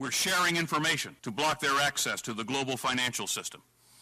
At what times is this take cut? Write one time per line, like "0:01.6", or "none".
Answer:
0:01.2